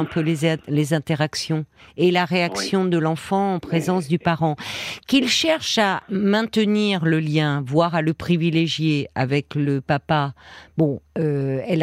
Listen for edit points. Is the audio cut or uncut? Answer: uncut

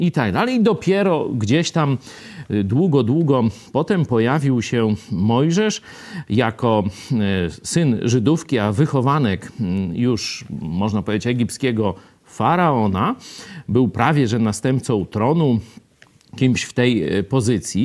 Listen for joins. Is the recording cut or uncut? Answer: uncut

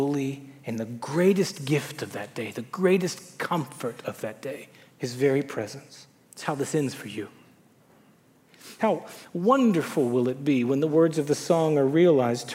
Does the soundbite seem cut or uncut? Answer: cut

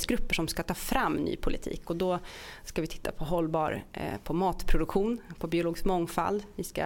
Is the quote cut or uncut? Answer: uncut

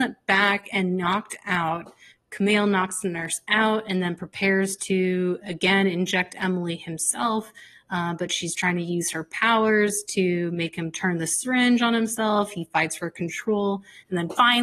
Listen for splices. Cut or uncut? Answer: cut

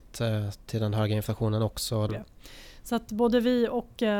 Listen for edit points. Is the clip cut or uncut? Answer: cut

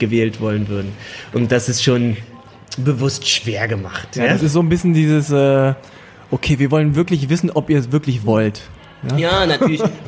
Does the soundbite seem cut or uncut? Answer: uncut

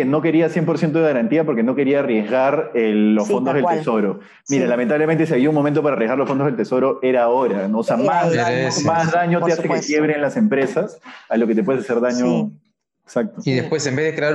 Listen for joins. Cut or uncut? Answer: uncut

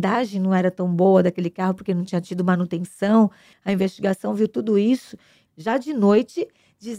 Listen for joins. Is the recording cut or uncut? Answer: cut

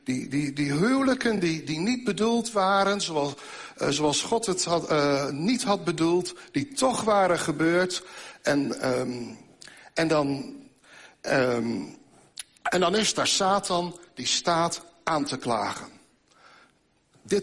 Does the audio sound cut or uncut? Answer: uncut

